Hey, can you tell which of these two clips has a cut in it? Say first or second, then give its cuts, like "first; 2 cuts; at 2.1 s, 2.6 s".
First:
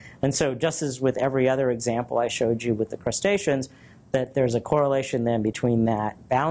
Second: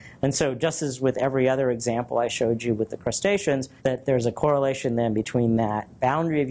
second; 1 cut; at 3.8 s